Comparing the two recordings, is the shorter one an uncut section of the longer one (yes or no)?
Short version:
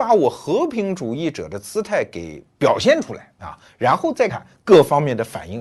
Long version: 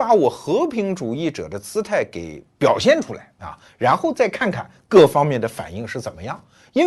no